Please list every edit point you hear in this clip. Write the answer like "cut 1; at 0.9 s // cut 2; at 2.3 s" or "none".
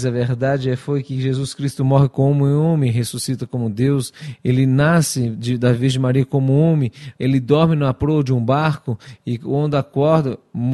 cut 1; at 7.1 s